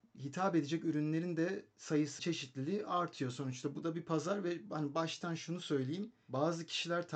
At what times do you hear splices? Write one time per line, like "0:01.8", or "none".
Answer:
0:02.2